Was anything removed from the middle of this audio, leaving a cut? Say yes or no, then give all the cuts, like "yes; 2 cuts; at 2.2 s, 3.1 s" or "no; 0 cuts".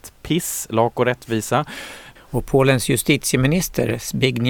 yes; 1 cut; at 2.2 s